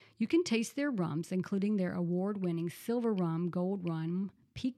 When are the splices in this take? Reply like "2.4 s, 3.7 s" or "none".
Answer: none